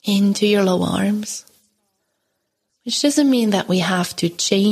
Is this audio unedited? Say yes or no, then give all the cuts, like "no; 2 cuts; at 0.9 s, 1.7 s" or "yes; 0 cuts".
no; 1 cut; at 2.7 s